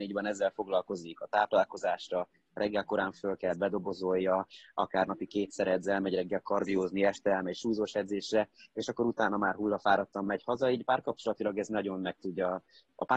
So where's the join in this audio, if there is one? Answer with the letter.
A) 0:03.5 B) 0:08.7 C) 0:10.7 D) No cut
A